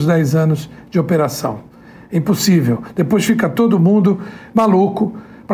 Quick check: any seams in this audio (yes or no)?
no